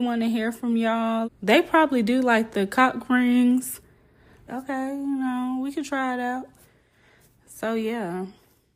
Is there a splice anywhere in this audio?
yes; 2 cuts; at 1.2 s, 4.5 s

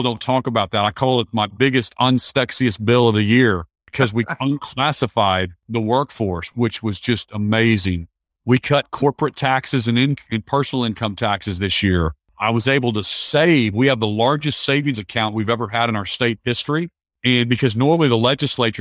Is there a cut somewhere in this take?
no; 0 cuts

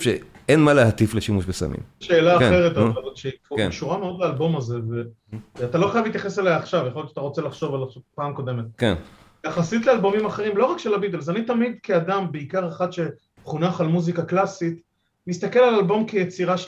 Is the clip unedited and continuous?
no; 1 cut; at 2.0 s

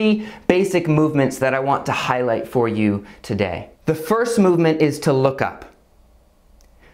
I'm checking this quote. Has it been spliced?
yes; 1 cut; at 3.7 s

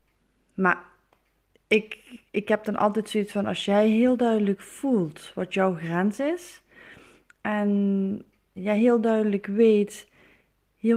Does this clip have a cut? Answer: yes; 1 cut; at 8.6 s

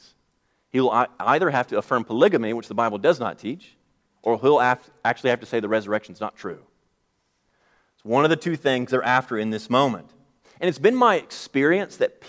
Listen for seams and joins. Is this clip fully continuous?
yes; 0 cuts

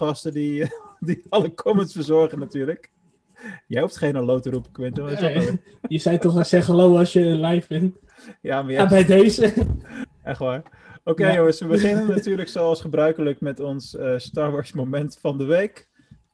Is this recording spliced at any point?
no; 0 cuts

